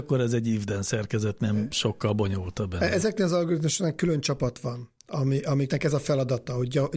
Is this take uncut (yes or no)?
yes